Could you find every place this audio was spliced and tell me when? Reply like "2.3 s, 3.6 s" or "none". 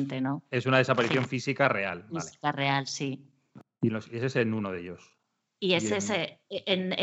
none

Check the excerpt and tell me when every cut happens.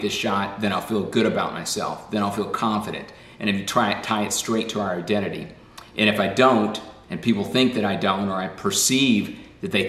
none

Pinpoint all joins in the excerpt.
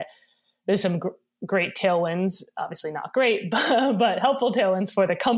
none

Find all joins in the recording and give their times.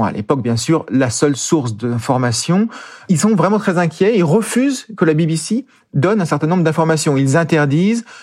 none

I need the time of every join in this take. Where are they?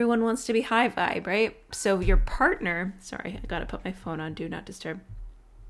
1.7 s

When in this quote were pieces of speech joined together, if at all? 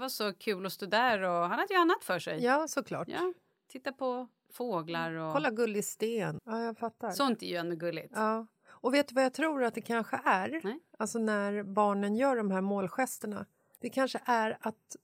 6.4 s, 13.8 s

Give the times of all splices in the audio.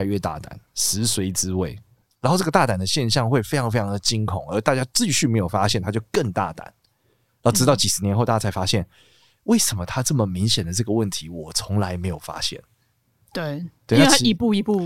none

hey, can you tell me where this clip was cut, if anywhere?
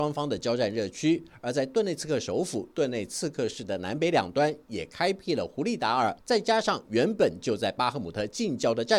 6.2 s

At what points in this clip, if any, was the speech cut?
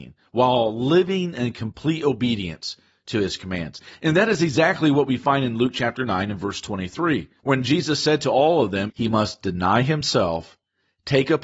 7.4 s, 8.9 s

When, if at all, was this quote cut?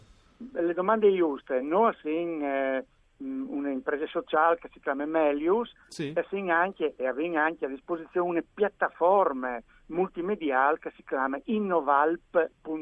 none

